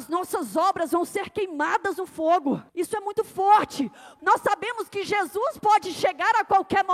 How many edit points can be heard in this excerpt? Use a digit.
2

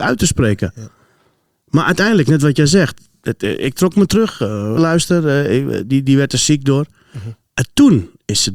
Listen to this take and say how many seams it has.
1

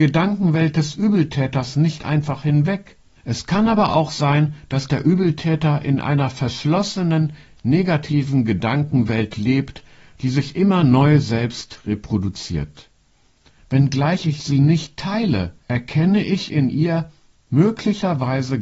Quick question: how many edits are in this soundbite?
3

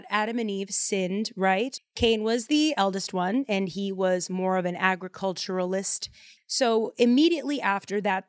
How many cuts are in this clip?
2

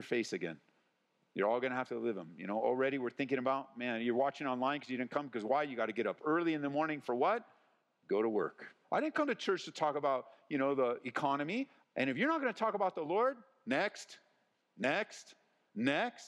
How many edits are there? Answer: 2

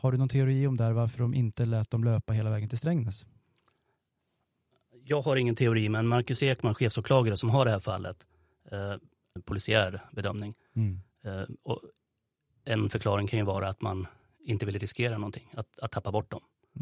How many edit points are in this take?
1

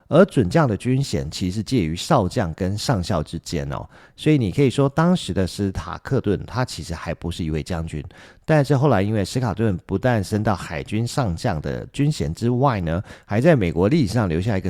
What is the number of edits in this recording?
0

